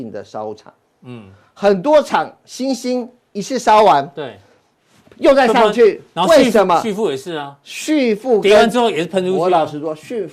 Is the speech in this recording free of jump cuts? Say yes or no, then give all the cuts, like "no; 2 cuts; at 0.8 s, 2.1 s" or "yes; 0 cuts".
yes; 0 cuts